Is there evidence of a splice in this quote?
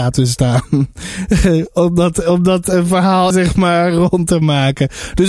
yes; 1 cut; at 3.3 s

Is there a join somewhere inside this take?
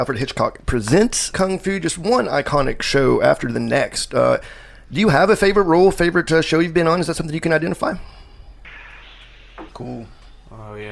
yes; 2 cuts; at 1.3 s, 9.7 s

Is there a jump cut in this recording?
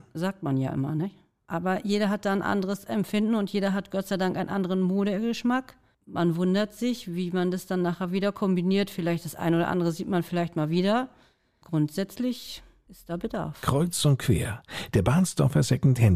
no; 0 cuts

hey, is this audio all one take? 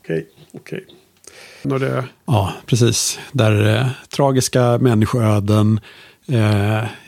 no; 2 cuts; at 1.6 s, 4.0 s

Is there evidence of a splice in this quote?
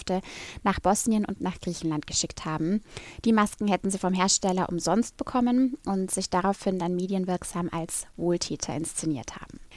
no; 0 cuts

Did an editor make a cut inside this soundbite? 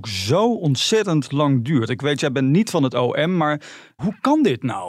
no; 0 cuts

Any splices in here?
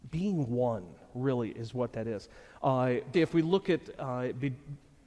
yes; 1 cut; at 3.1 s

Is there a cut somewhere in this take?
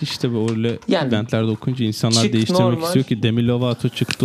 no; 0 cuts

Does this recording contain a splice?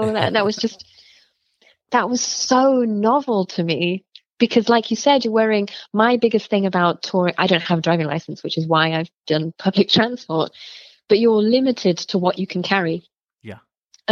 yes; 1 cut; at 9.6 s

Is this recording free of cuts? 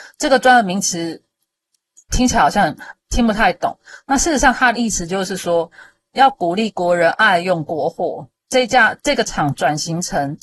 no; 1 cut; at 8.4 s

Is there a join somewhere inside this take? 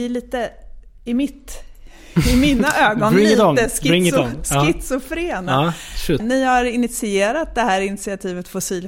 yes; 1 cut; at 6.2 s

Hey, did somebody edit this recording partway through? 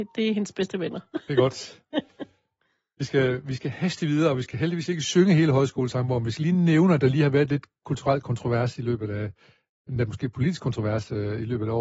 no; 0 cuts

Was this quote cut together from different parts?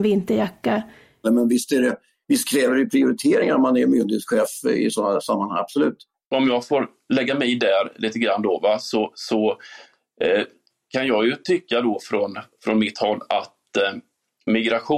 yes; 1 cut; at 1.2 s

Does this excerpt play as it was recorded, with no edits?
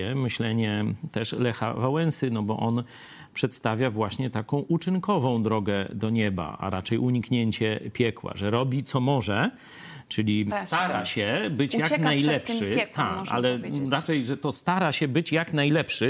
no; 1 cut; at 10.5 s

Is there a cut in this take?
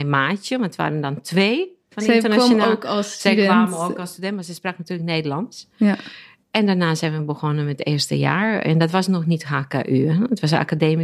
no; 0 cuts

